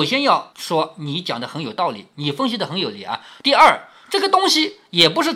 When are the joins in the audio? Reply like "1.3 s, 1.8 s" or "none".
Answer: 3.4 s